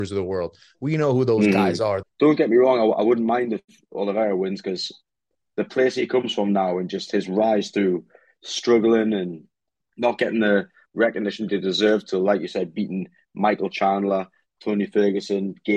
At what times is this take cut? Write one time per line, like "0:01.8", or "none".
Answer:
0:02.0